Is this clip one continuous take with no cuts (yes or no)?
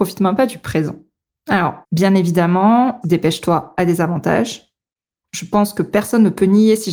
no